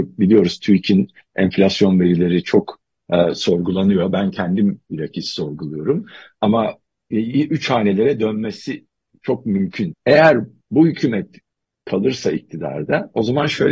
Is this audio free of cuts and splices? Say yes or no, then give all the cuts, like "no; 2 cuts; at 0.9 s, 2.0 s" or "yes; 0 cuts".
no; 1 cut; at 9.9 s